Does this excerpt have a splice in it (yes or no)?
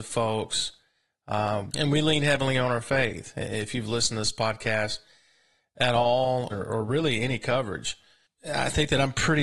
yes